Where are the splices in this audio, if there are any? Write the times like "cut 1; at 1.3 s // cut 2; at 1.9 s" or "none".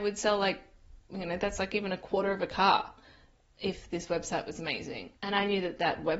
cut 1; at 5.2 s